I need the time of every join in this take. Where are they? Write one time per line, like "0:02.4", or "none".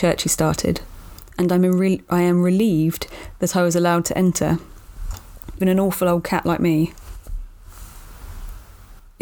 0:05.6